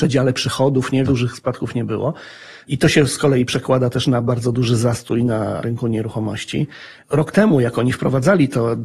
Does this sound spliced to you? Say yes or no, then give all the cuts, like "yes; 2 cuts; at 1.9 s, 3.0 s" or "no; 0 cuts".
yes; 1 cut; at 1.1 s